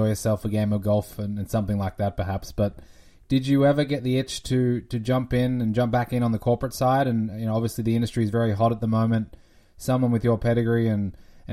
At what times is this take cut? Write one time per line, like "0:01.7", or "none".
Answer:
none